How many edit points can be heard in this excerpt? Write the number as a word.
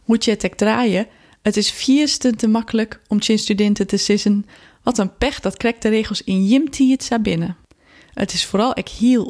zero